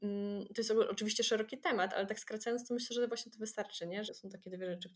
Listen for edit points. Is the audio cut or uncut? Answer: cut